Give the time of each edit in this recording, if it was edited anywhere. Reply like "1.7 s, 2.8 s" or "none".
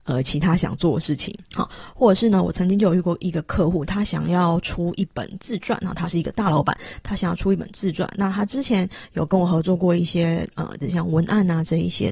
1.4 s, 10.8 s